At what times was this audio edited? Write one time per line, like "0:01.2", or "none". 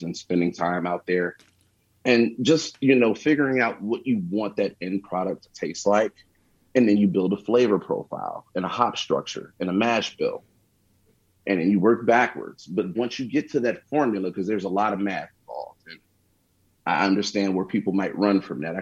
0:12.9

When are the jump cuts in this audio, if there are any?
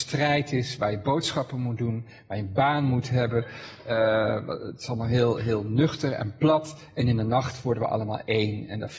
0:05.4

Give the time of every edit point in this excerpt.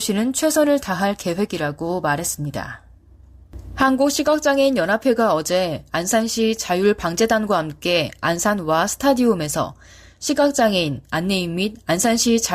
none

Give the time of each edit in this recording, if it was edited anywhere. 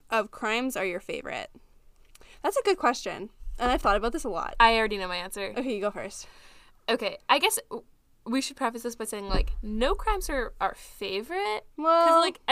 none

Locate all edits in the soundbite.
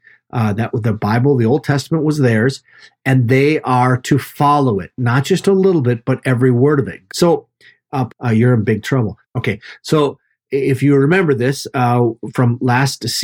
0:07.1
0:08.1
0:09.2

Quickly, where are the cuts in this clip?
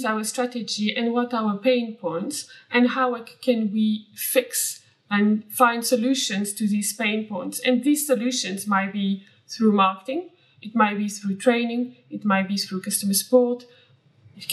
none

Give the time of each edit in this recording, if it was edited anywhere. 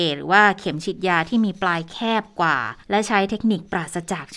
0:02.8

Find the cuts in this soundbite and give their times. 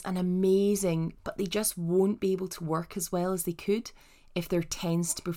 0:01.2

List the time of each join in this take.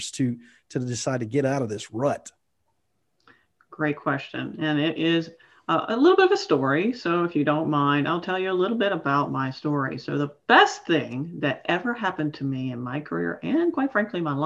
none

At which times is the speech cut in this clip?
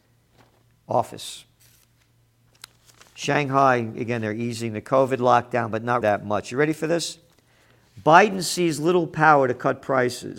0:06.0

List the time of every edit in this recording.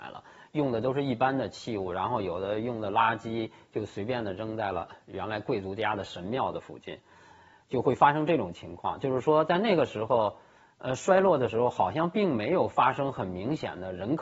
none

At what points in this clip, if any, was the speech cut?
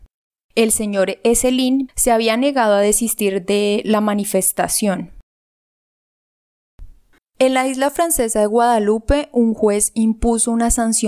0:01.9
0:07.2

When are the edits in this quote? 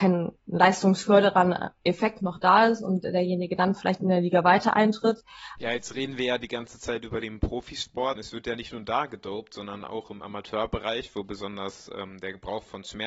0:05.6
0:08.2

